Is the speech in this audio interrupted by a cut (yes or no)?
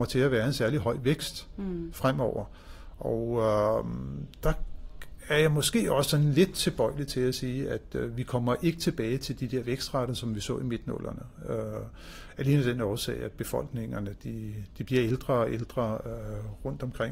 no